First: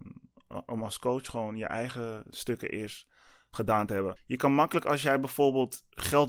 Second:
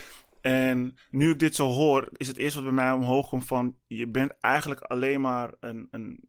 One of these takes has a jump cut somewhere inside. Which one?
first; 1 cut; at 4.2 s

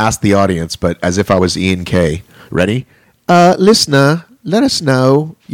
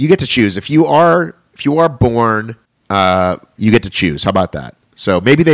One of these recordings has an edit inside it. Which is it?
second; 1 cut; at 3.6 s

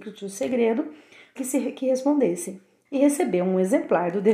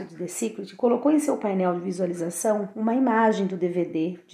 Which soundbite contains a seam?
first; 2 cuts; at 1.4 s, 2.8 s

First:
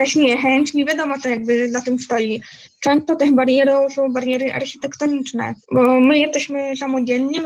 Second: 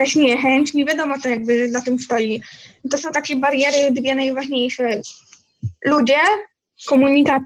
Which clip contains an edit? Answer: first; 2 cuts; at 2.6 s, 5.6 s

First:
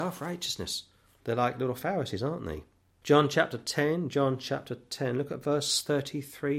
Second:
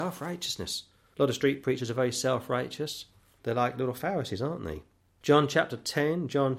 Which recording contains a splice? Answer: first; 1 cut; at 1.1 s

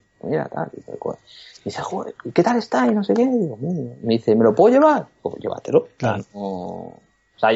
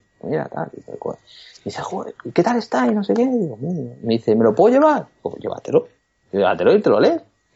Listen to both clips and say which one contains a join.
first; 1 cut; at 6.0 s

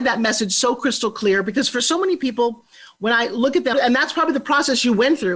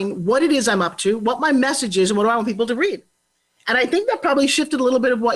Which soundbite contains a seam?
first; 1 cut; at 3.7 s

